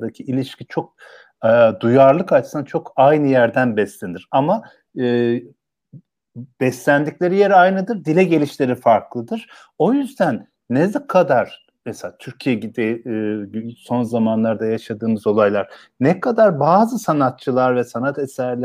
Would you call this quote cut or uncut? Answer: uncut